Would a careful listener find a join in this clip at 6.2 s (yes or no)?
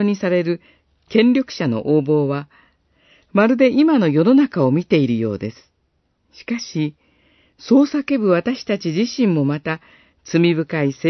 yes